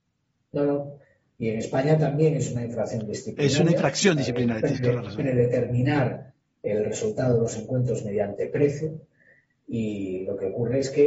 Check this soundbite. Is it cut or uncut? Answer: uncut